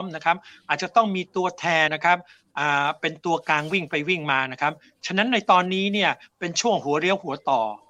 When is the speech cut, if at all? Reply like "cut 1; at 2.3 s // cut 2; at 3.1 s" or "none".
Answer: cut 1; at 1.9 s